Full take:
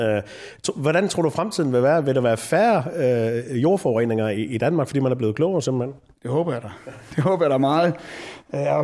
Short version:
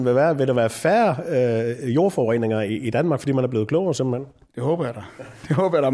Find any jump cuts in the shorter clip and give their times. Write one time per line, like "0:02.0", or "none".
none